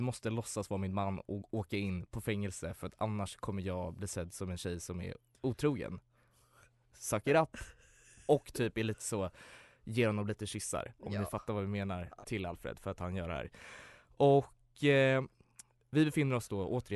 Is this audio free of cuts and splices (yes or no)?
no